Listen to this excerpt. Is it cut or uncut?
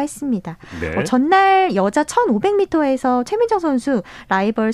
uncut